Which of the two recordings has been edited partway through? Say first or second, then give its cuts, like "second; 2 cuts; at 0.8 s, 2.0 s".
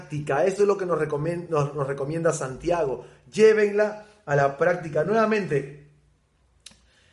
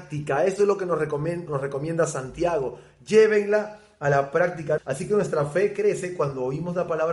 second; 2 cuts; at 1.5 s, 4.8 s